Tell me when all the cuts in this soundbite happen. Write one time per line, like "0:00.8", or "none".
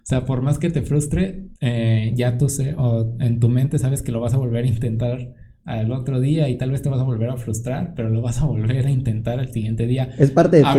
0:01.6